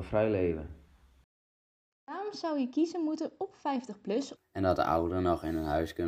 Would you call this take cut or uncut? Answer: cut